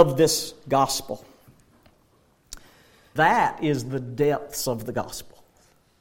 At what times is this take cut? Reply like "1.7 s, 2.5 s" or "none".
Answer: 3.2 s